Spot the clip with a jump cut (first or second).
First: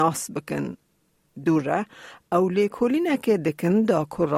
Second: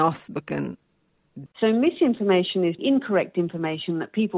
second